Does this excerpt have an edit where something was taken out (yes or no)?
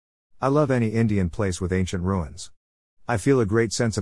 no